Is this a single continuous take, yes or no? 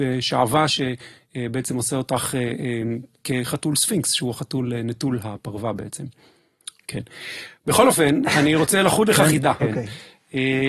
no